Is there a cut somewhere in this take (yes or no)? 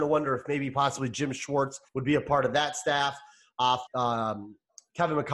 yes